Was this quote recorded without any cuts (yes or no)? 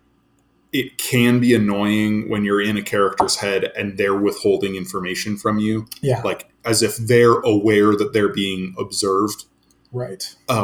yes